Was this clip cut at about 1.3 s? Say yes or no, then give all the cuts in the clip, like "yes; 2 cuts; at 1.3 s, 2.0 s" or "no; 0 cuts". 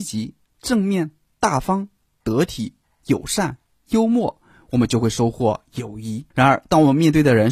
no; 1 cut; at 6.3 s